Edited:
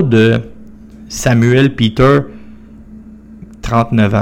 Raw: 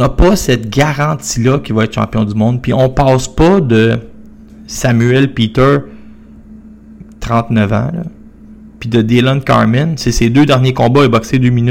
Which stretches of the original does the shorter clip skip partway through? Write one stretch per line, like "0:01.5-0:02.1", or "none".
none